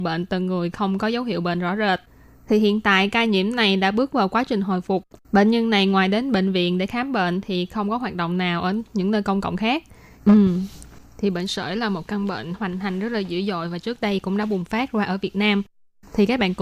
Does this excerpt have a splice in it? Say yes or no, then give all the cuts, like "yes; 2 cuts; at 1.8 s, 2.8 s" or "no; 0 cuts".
yes; 2 cuts; at 5.2 s, 10.2 s